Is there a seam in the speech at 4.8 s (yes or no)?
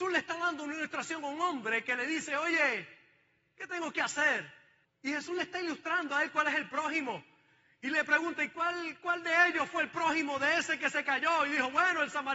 yes